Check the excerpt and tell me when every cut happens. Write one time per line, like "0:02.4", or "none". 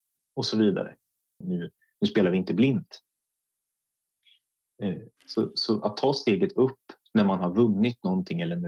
0:01.4
0:05.2